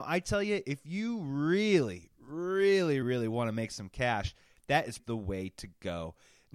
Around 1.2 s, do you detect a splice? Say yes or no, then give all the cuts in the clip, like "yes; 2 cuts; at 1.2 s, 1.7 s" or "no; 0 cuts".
no; 2 cuts; at 3.0 s, 5.0 s